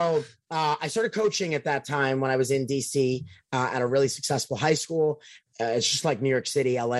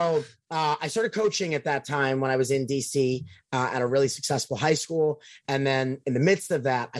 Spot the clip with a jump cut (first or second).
first